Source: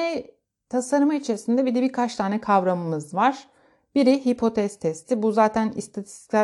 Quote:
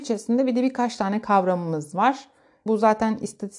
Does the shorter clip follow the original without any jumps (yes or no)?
no